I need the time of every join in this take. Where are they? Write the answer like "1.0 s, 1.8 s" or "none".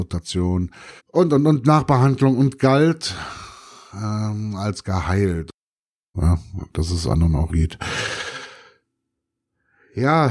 1.0 s, 6.1 s, 7.5 s